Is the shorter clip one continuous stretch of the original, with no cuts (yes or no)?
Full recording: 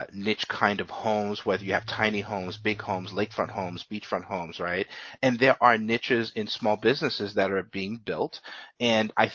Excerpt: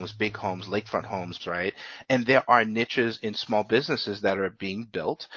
no